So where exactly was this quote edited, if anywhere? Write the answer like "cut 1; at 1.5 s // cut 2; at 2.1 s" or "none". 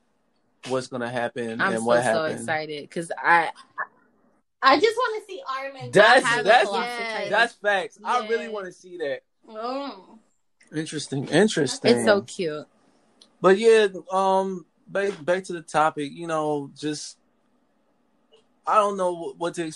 cut 1; at 9.4 s